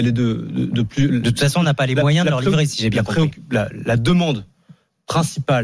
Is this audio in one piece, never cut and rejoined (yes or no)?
yes